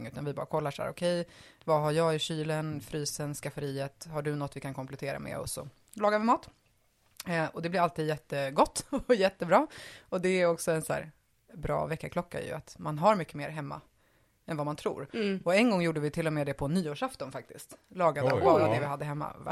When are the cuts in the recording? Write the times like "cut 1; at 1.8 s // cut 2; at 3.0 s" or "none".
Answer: none